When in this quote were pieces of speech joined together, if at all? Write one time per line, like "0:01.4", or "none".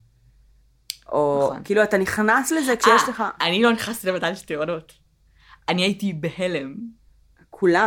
none